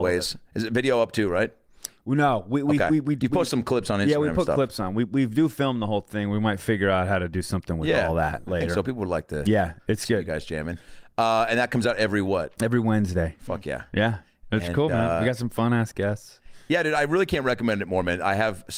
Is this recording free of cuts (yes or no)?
yes